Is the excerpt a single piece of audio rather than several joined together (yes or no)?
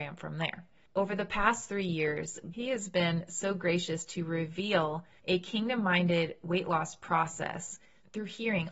no